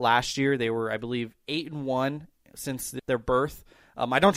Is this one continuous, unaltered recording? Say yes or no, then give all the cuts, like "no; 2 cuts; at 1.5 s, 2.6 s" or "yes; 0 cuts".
no; 1 cut; at 3.0 s